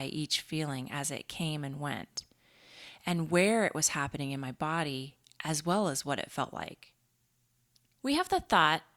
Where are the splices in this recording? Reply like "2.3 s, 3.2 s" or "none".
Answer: 7.9 s